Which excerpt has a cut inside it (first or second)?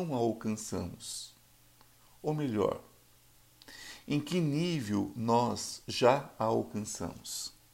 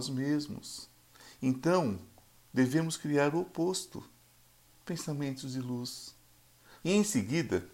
second